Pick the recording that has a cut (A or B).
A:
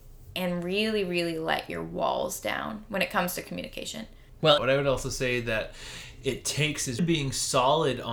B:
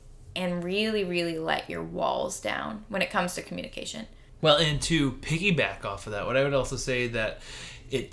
A